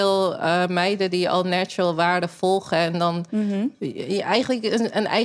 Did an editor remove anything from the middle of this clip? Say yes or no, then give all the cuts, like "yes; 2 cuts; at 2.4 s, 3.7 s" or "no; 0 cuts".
no; 0 cuts